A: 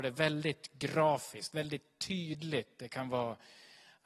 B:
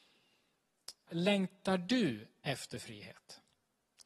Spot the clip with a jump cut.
B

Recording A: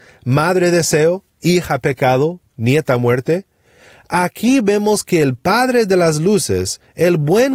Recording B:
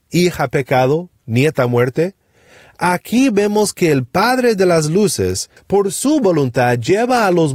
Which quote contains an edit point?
B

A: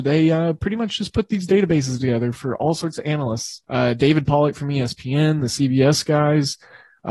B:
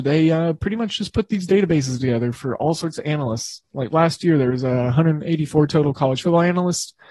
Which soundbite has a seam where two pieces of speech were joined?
A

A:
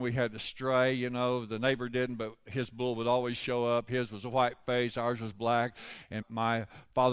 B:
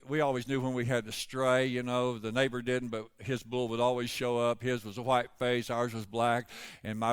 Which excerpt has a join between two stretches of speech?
A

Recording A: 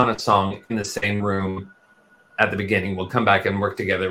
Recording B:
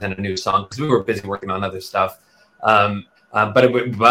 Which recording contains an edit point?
B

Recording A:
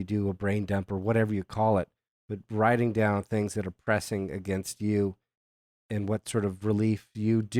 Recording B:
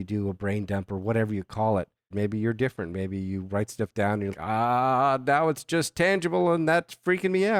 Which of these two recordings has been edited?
B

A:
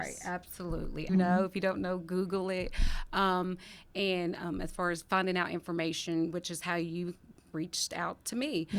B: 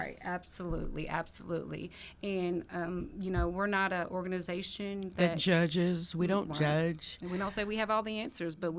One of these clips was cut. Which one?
A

